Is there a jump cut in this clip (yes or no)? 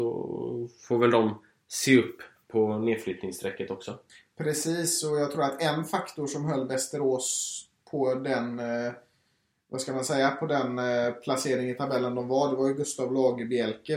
no